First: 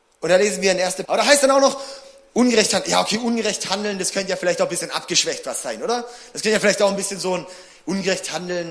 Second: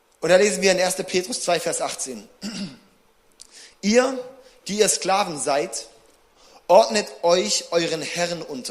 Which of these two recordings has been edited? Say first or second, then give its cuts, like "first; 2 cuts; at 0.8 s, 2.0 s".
first; 1 cut; at 1.0 s